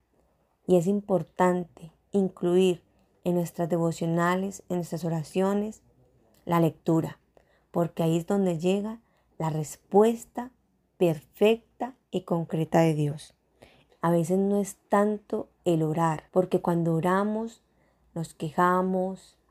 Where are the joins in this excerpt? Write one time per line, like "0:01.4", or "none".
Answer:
0:13.9
0:16.3